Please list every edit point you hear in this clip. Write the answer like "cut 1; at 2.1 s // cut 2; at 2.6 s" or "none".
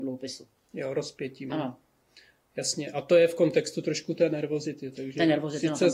cut 1; at 1.5 s

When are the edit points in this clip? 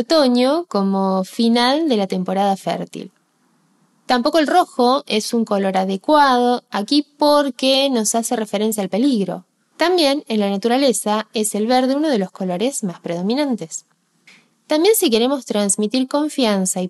cut 1; at 9.7 s // cut 2; at 14.5 s

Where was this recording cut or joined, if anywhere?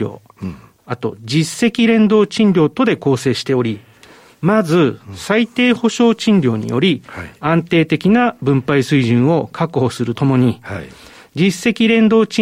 cut 1; at 10.1 s

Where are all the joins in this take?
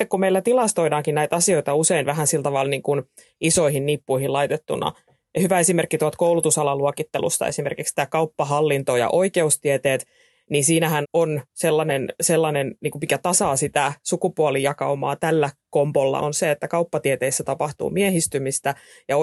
cut 1; at 11.0 s // cut 2; at 16.2 s

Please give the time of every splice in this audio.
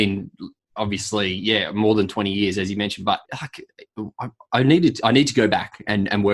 cut 1; at 3.2 s

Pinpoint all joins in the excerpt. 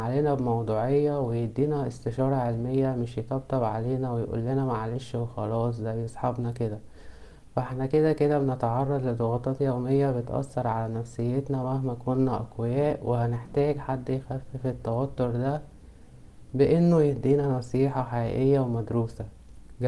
none

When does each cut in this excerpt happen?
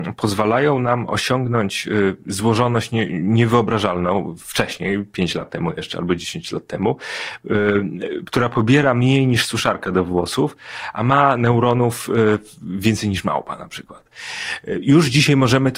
cut 1; at 8.2 s

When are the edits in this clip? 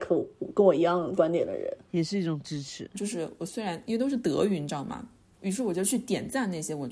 cut 1; at 2.9 s // cut 2; at 5.3 s

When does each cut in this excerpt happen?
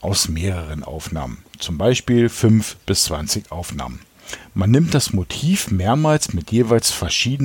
none

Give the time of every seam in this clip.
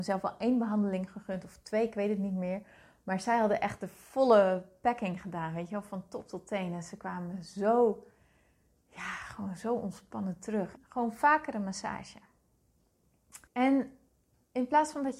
cut 1; at 10.8 s // cut 2; at 13.5 s

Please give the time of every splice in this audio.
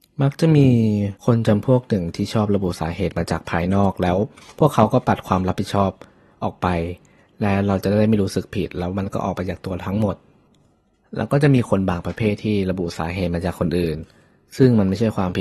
cut 1; at 1.2 s

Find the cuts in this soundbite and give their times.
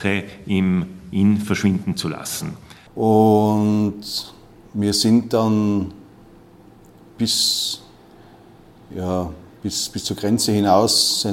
cut 1; at 2.9 s

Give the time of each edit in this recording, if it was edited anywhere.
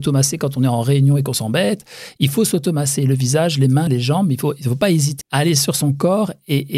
cut 1; at 3.9 s // cut 2; at 5.2 s

